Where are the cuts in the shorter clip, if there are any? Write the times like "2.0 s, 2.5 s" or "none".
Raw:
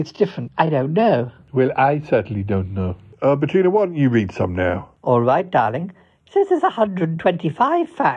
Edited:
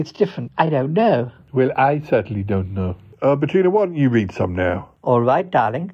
none